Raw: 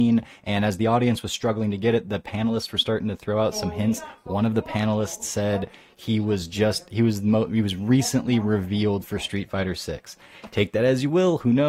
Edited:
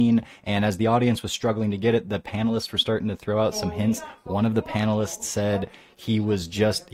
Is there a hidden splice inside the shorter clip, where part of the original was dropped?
no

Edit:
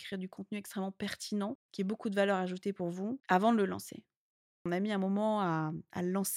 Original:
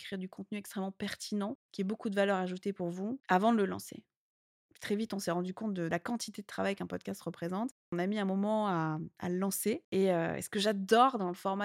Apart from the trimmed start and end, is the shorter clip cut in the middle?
yes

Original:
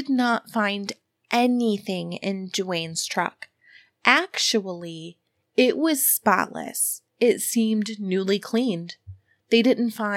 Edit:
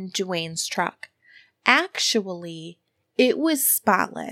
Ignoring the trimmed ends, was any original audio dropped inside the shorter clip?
no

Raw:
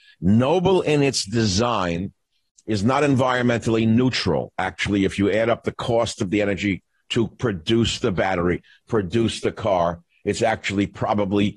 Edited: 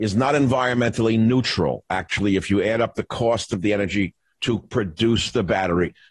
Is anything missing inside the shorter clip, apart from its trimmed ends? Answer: no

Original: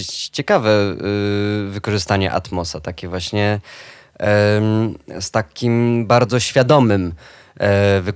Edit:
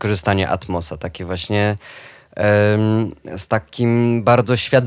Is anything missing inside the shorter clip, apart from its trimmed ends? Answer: no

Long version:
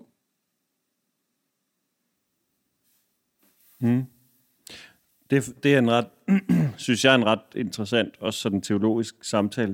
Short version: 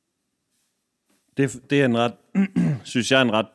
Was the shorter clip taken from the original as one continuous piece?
no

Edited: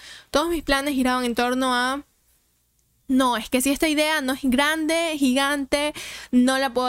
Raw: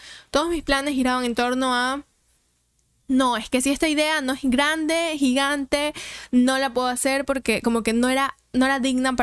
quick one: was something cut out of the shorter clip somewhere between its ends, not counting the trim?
no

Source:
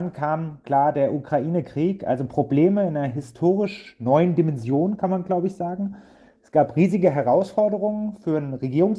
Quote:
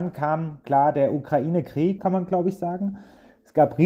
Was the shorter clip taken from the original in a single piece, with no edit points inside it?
no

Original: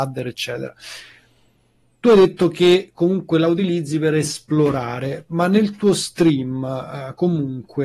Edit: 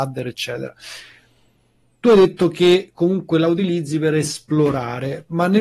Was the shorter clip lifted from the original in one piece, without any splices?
yes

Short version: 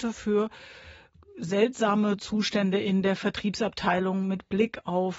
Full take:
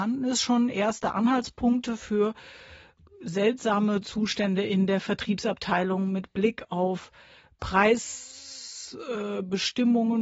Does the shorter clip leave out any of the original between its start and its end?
no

